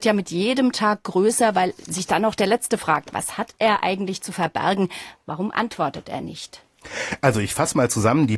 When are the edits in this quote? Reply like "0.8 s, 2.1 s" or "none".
none